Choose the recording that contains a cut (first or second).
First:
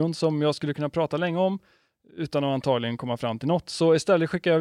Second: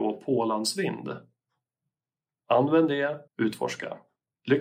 second